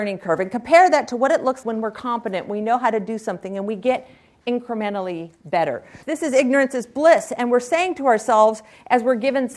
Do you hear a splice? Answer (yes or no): yes